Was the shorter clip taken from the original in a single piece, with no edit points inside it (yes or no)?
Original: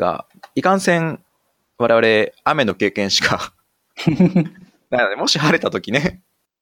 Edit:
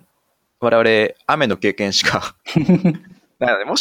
no